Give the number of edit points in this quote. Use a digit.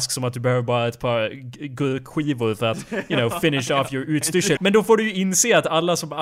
1